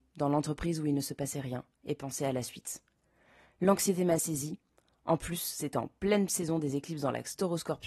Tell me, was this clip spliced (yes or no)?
no